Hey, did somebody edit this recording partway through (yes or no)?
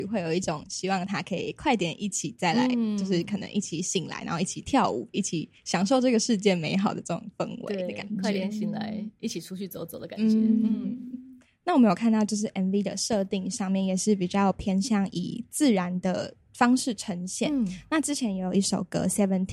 no